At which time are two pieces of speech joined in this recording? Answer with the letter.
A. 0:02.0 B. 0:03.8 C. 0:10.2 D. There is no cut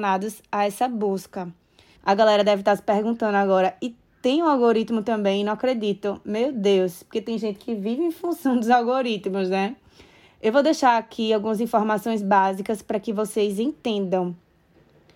A